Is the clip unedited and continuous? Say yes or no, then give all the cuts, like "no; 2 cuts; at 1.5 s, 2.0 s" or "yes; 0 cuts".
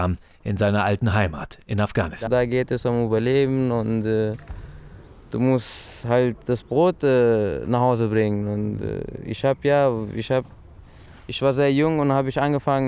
no; 1 cut; at 2.3 s